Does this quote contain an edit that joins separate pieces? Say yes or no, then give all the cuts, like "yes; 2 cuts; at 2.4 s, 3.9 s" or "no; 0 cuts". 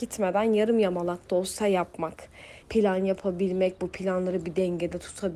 yes; 1 cut; at 2.6 s